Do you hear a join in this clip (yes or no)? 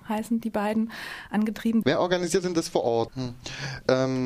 yes